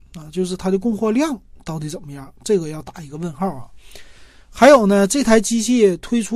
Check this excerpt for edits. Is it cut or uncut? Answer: uncut